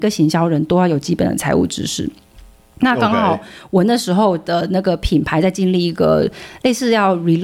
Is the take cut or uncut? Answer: uncut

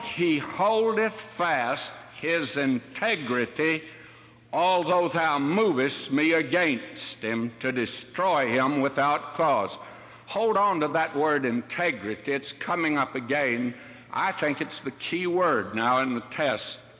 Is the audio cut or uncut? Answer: uncut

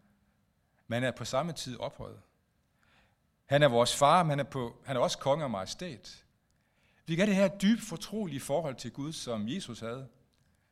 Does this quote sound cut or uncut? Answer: uncut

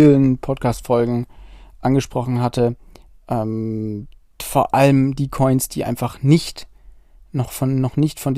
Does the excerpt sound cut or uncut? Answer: uncut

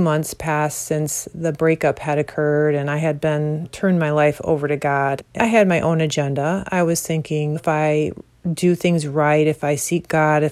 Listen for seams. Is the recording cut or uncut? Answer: uncut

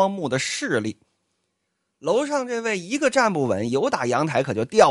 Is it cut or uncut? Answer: uncut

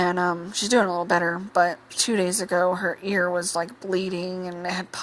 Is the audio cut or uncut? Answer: cut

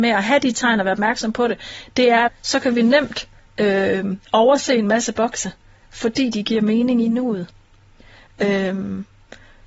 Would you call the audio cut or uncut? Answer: cut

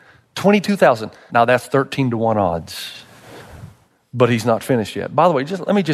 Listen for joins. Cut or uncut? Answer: cut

